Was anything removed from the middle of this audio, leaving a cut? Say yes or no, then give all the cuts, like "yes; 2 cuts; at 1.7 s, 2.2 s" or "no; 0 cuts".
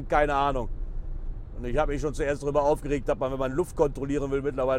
no; 0 cuts